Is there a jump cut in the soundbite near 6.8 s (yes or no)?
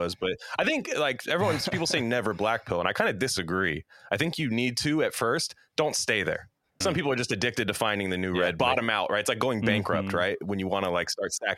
yes